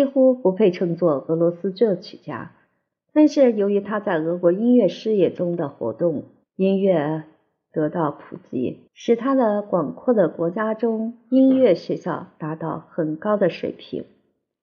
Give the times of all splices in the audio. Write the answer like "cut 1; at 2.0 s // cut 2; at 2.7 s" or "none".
cut 1; at 6.4 s // cut 2; at 8.9 s